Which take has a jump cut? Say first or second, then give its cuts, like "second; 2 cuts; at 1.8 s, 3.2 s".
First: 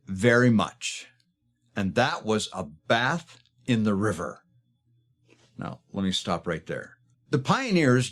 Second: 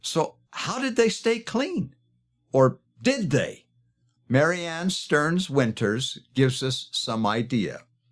first; 1 cut; at 7.1 s